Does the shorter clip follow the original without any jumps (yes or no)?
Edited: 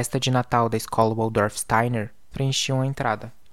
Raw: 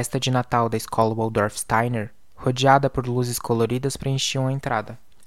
no